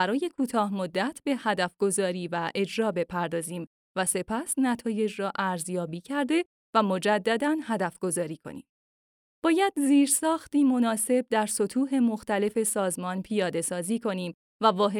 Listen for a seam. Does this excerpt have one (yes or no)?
no